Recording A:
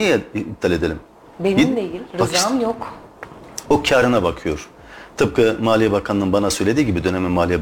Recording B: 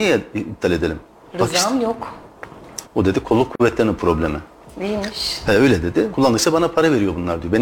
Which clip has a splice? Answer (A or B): B